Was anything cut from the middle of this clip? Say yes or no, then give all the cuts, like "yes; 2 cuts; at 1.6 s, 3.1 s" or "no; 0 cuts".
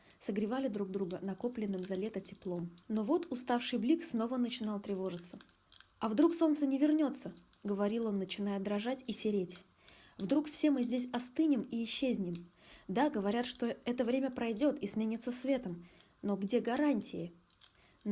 yes; 1 cut; at 2.8 s